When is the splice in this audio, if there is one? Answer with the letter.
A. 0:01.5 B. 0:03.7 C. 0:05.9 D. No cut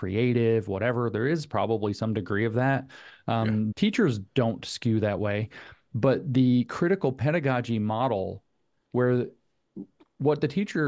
B